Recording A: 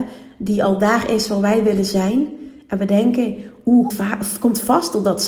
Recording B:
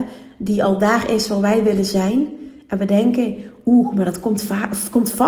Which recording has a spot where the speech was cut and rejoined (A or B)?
A